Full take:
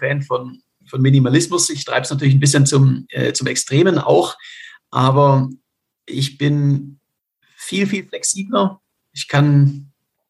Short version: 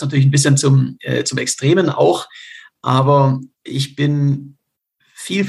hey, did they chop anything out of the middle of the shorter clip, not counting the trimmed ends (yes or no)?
yes